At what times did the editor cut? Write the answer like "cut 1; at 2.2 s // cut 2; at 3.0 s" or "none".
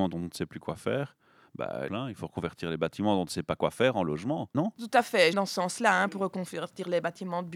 cut 1; at 1.9 s // cut 2; at 5.3 s